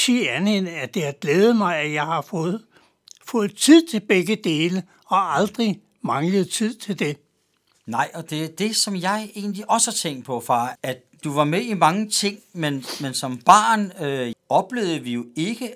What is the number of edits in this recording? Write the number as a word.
two